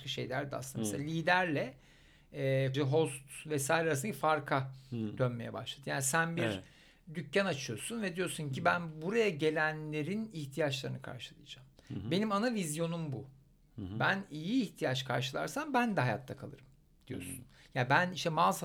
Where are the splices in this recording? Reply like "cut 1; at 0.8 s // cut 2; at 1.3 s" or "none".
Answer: cut 1; at 2.7 s